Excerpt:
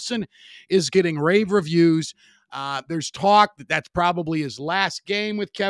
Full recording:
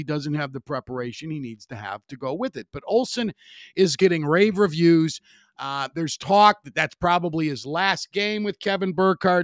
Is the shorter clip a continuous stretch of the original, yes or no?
yes